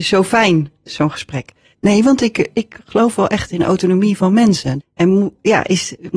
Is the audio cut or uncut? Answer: cut